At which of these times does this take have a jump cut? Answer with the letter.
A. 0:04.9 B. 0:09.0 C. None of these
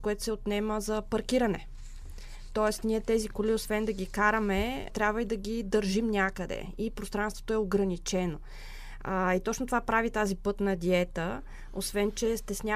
A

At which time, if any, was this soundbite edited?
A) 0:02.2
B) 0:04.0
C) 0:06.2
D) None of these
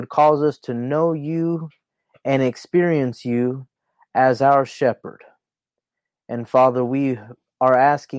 D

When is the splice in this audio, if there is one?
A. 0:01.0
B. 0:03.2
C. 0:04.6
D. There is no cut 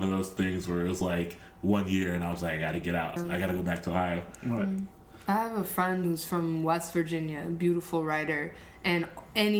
B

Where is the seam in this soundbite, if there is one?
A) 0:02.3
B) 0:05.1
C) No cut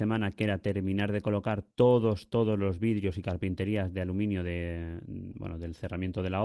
C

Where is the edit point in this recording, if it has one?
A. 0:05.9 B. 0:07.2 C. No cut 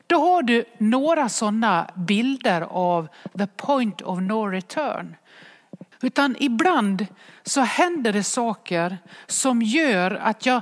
A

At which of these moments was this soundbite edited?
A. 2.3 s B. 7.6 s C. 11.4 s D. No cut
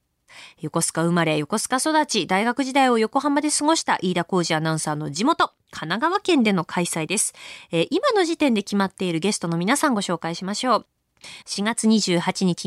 C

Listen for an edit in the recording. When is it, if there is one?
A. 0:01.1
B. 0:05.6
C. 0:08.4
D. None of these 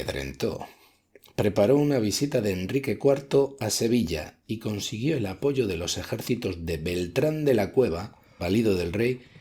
C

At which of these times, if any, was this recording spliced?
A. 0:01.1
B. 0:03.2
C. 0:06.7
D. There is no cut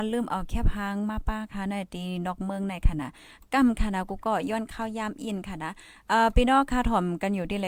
D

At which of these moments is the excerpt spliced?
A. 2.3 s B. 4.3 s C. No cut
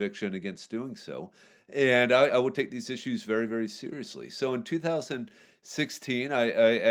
A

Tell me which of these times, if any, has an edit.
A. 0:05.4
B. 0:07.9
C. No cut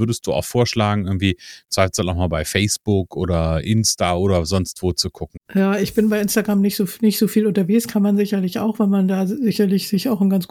A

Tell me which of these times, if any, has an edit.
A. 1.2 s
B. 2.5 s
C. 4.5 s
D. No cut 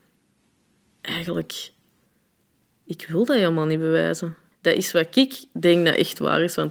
C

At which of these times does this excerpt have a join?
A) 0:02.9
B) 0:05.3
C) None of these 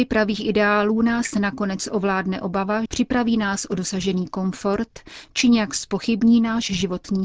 A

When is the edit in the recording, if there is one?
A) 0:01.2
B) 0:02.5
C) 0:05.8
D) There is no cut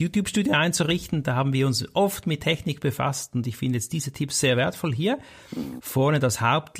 C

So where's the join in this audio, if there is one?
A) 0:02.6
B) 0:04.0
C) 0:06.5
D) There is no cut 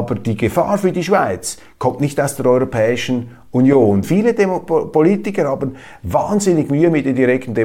B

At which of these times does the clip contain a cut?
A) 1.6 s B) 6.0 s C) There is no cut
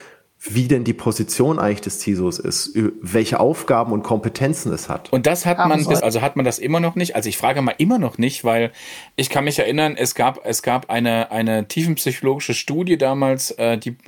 B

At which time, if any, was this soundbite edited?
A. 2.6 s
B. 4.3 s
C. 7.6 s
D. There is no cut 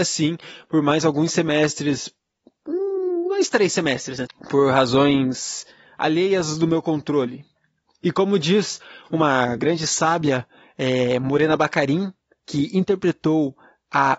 B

